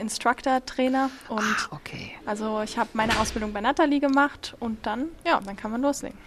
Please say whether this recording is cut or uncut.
cut